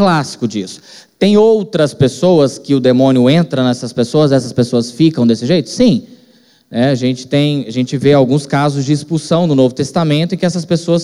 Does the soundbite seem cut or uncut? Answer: uncut